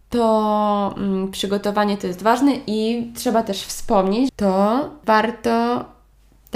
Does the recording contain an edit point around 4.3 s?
yes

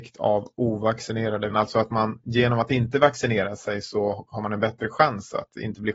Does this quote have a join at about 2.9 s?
no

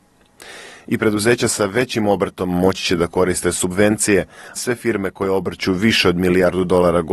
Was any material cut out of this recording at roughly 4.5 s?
yes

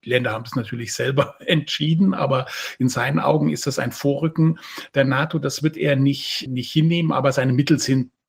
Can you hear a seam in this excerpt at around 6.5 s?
yes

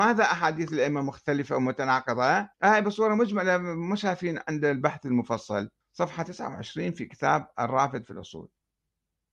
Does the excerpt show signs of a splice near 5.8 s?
yes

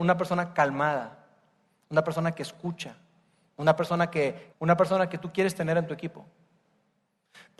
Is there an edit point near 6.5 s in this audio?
no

